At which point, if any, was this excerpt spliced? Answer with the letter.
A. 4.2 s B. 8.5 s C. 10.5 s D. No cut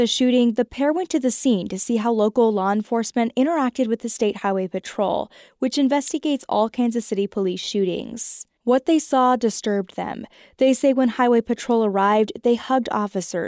D